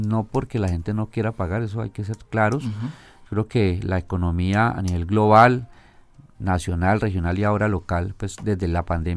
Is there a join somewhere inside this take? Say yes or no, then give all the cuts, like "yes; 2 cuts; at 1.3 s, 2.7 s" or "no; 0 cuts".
no; 0 cuts